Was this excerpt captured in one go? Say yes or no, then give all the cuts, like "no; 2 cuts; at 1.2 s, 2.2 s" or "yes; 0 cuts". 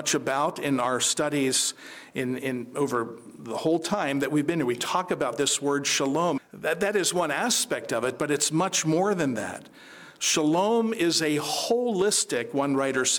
no; 1 cut; at 6.4 s